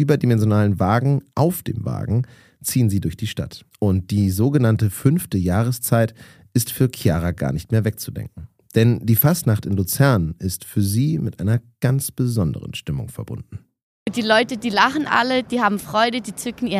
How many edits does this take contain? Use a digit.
2